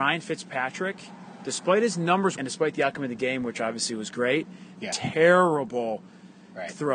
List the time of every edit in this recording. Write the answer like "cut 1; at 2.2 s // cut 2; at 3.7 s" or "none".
cut 1; at 2.4 s // cut 2; at 4.7 s